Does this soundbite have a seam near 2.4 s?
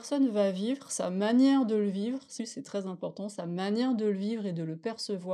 yes; 1 cut; at 2.4 s

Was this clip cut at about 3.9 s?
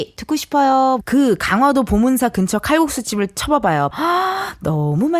yes; 2 cuts; at 1.0 s, 3.9 s

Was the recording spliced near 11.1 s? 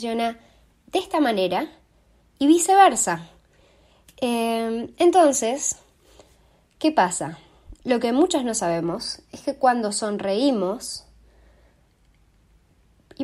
no; 0 cuts

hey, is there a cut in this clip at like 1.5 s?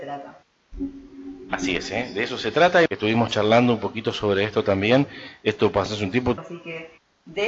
no; 2 cuts; at 2.9 s, 6.4 s

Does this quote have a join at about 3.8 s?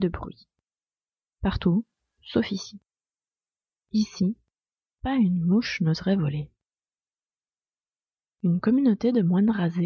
no; 1 cut; at 1.3 s

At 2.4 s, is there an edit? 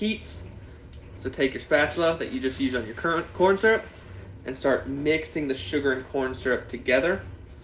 no; 1 cut; at 1.2 s

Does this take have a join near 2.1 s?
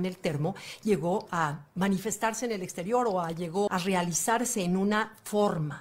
no; 1 cut; at 3.7 s

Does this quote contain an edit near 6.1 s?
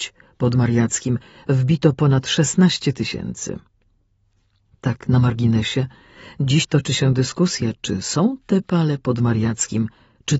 no; 0 cuts

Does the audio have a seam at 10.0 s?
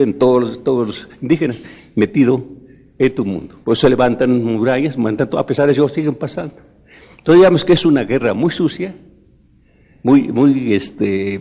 no; 1 cut; at 3.6 s

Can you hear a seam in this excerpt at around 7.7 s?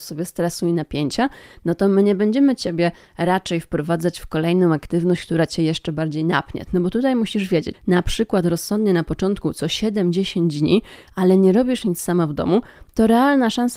yes; 2 cuts; at 6.7 s, 7.7 s

